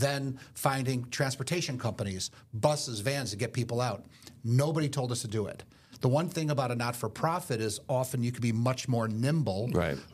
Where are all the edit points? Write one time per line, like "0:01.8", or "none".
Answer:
none